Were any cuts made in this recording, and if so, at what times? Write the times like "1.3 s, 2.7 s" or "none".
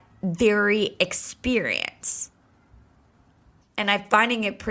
3.6 s